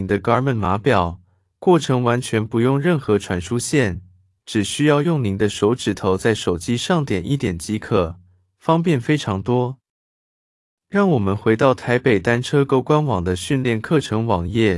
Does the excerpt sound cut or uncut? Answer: uncut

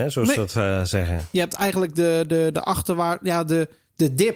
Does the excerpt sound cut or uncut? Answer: uncut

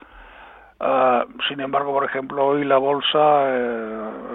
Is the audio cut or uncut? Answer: uncut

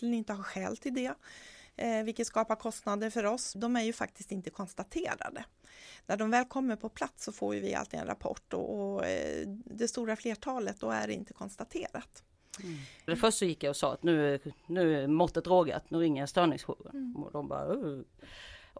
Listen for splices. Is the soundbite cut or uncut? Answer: cut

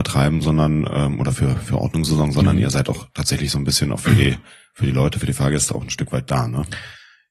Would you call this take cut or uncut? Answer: uncut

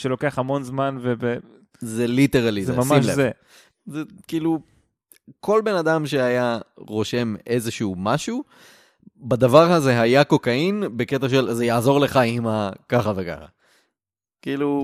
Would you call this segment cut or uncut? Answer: cut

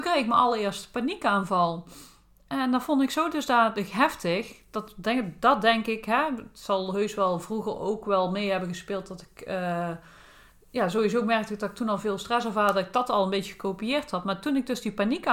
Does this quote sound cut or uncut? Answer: uncut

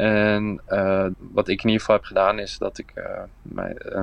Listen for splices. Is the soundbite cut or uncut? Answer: cut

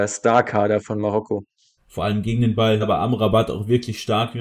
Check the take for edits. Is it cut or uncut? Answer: cut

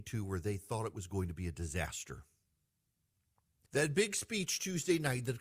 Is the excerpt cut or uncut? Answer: cut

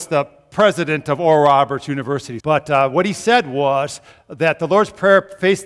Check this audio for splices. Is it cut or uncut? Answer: cut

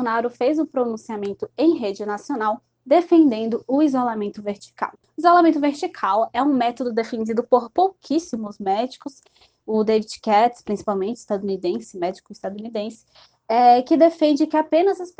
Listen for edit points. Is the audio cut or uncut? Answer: cut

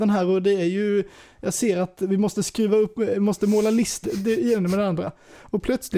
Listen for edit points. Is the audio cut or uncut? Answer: cut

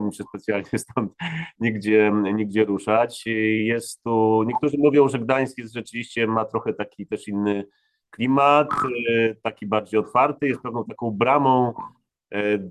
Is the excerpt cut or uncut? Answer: uncut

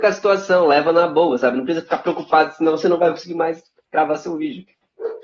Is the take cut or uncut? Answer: uncut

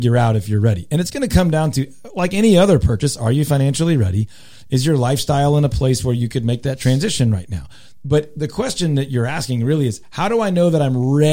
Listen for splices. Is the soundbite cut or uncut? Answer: uncut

